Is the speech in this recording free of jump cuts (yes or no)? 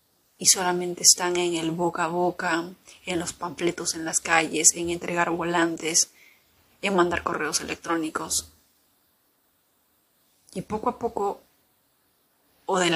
yes